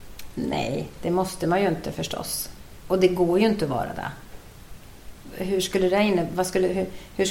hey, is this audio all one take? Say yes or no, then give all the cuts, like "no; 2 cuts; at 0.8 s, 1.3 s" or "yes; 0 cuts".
yes; 0 cuts